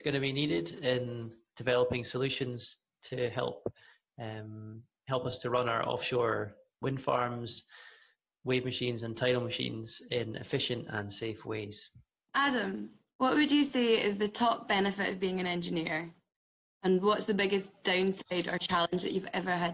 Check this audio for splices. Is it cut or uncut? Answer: uncut